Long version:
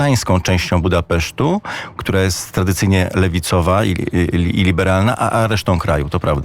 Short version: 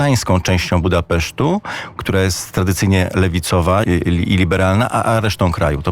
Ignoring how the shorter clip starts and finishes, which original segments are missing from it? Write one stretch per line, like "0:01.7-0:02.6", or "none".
0:03.8-0:04.1